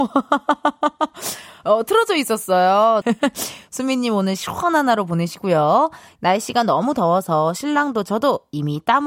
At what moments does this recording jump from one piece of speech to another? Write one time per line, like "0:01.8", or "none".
0:03.0
0:06.2